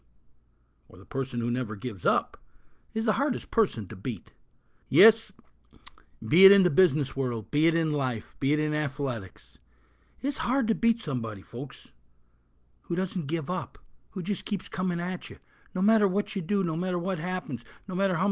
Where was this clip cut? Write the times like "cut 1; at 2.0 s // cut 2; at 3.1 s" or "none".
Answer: cut 1; at 4.8 s